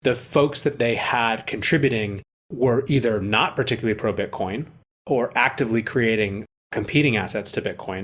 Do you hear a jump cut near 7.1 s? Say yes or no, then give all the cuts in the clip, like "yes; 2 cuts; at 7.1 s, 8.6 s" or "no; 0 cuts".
no; 0 cuts